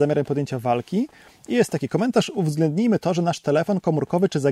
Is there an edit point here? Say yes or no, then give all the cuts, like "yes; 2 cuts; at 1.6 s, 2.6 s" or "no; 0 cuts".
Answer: no; 0 cuts